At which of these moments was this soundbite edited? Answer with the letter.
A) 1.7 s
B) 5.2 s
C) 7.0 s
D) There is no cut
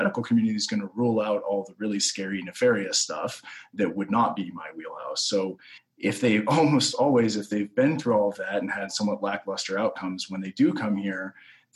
D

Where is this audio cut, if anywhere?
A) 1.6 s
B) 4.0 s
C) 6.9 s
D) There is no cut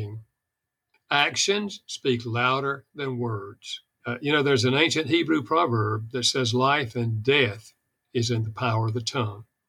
B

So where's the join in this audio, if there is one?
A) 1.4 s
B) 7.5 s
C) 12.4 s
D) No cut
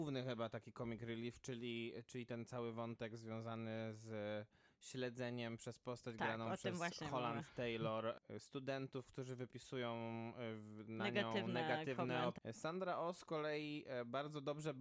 C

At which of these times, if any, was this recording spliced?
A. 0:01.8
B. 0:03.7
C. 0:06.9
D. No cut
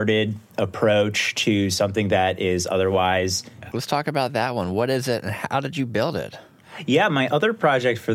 B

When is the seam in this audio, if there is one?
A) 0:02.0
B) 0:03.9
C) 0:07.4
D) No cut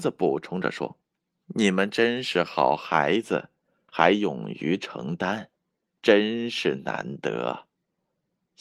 B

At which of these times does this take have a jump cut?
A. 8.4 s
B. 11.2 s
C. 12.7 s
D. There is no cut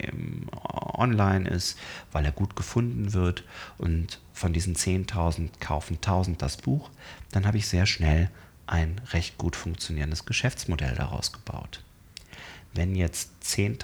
C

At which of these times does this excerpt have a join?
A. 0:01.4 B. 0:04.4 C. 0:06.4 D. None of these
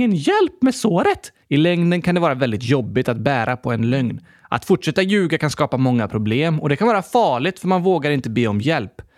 A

